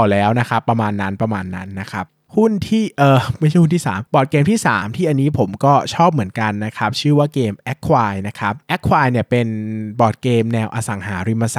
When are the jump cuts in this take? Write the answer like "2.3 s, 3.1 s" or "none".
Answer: none